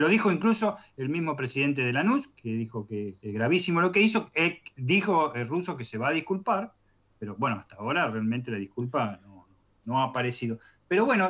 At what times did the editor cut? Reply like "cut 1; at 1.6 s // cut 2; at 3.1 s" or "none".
none

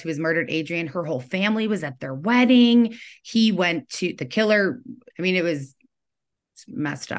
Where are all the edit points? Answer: cut 1; at 5.1 s

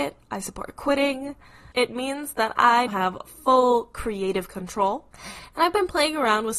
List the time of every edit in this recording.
cut 1; at 1.7 s // cut 2; at 2.9 s

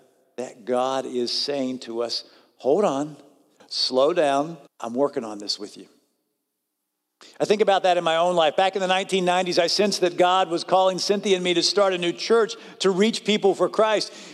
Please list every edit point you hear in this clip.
cut 1; at 4.7 s

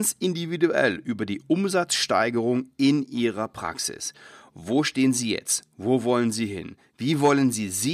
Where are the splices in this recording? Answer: none

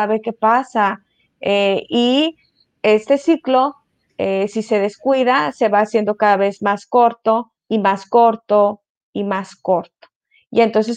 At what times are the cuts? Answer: cut 1; at 7.6 s

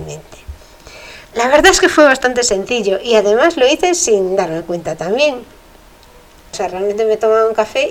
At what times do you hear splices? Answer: cut 1; at 1.2 s // cut 2; at 6.5 s

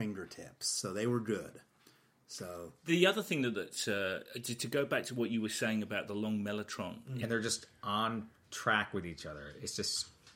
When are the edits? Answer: cut 1; at 7.2 s

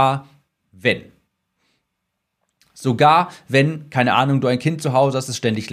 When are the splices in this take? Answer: none

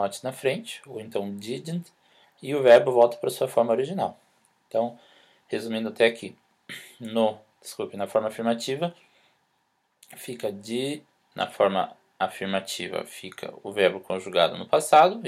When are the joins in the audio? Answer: cut 1; at 7.5 s

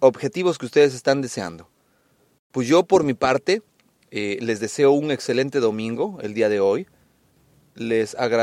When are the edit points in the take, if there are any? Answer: none

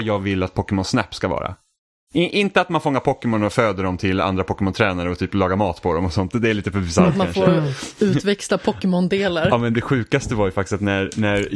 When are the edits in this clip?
none

